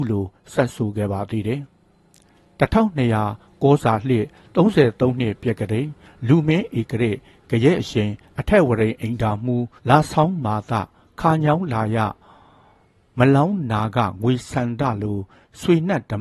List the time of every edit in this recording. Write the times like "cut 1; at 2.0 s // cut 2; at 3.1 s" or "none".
cut 1; at 9.8 s